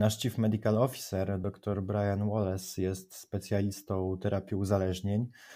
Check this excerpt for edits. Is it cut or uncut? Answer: uncut